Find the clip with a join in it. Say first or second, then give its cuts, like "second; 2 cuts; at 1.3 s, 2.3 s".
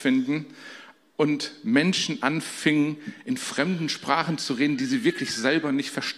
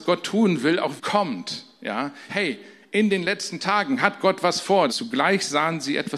second; 3 cuts; at 1.0 s, 2.3 s, 4.9 s